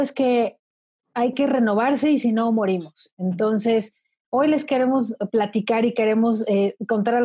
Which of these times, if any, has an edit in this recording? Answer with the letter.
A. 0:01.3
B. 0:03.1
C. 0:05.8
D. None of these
A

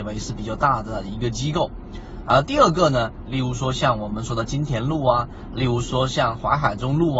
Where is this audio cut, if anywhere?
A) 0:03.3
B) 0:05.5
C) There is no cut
A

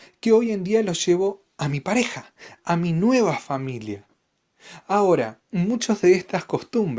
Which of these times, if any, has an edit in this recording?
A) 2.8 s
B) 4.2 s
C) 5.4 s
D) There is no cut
C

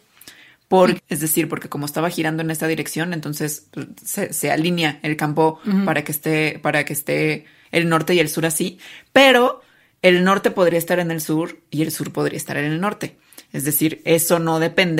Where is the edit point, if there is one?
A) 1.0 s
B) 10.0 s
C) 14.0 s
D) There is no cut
A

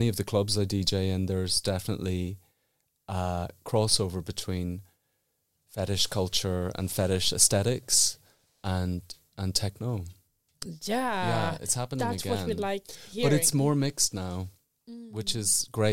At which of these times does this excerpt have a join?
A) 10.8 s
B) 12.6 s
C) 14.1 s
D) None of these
D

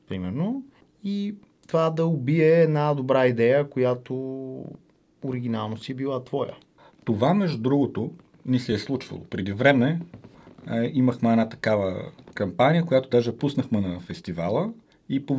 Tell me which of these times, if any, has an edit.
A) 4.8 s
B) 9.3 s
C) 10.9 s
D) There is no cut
D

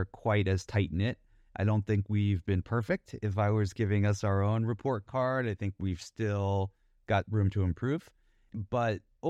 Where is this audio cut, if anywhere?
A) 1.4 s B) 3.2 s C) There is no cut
A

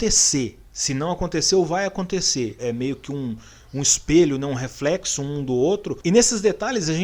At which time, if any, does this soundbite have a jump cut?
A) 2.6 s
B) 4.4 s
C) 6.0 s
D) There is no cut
A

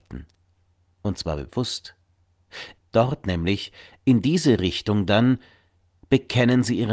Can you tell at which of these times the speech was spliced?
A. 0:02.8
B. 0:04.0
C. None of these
A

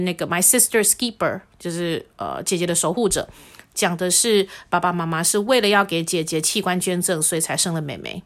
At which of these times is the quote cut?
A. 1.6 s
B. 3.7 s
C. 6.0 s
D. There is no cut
D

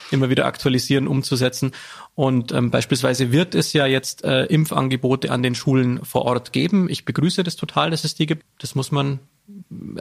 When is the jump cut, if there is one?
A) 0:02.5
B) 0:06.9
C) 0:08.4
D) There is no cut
C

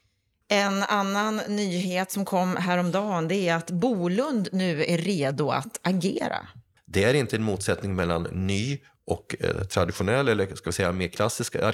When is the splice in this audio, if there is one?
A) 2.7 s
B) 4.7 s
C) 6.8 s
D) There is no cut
C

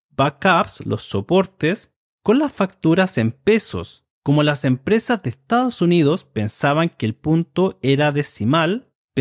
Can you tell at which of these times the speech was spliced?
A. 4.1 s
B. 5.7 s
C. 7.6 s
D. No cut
A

